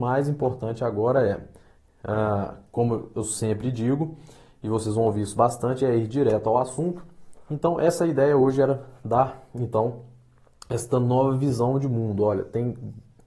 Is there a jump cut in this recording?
yes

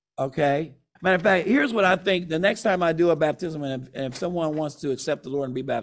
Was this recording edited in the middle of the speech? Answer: yes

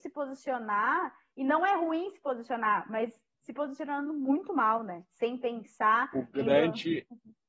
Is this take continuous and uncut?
yes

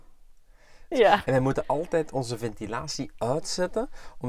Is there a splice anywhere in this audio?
yes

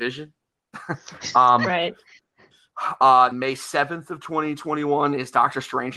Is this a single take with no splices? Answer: no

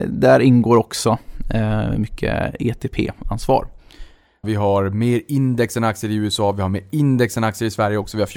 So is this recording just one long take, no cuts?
no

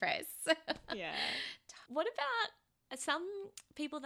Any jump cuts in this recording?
yes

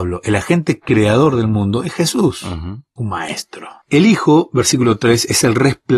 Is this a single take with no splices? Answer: no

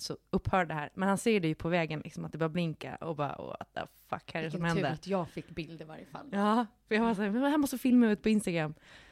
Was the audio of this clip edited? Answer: no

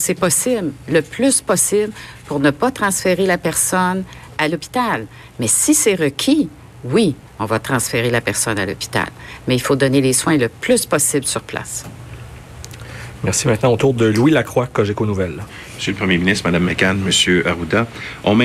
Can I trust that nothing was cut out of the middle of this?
yes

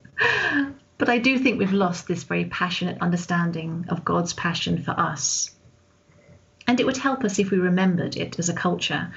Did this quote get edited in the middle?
no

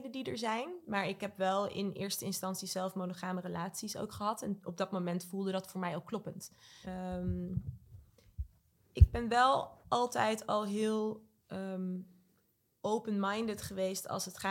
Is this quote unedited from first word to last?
no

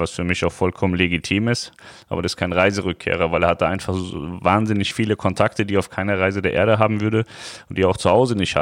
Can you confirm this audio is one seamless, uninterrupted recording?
yes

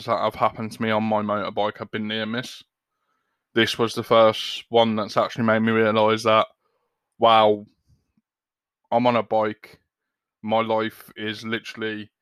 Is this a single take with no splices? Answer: yes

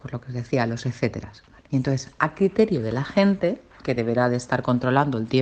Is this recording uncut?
no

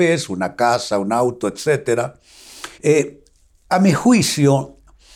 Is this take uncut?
no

